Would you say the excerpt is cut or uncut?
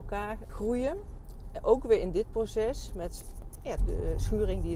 cut